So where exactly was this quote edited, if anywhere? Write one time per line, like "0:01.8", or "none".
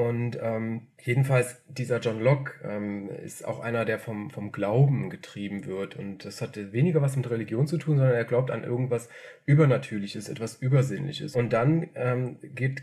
0:01.0
0:11.3

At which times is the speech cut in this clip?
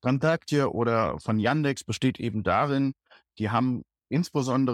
none

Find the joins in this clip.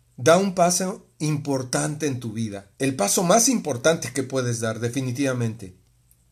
0:02.7

